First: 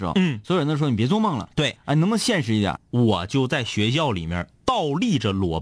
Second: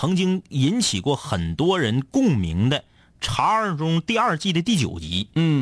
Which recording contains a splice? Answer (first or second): first